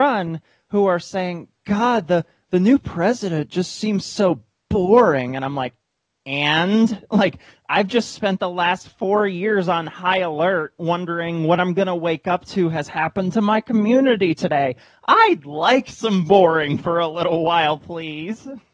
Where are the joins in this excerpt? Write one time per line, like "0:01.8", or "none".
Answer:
none